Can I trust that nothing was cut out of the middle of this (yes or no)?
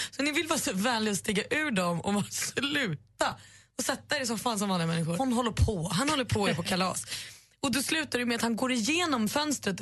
no